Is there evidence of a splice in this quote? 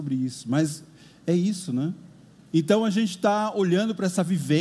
yes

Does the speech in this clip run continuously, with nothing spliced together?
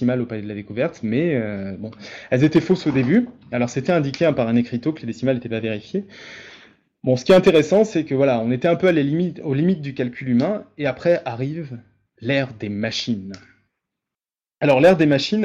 yes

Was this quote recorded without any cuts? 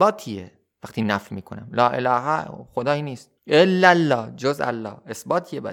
no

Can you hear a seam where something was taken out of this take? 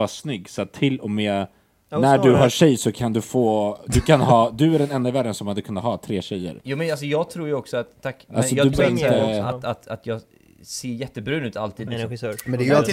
yes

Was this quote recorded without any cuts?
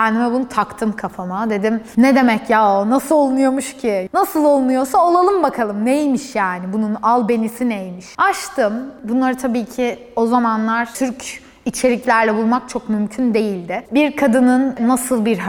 no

